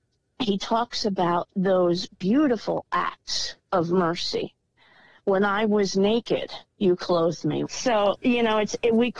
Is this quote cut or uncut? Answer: cut